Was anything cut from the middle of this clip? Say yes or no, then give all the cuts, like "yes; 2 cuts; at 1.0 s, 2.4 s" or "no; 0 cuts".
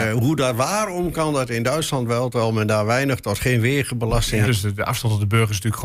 yes; 1 cut; at 4.4 s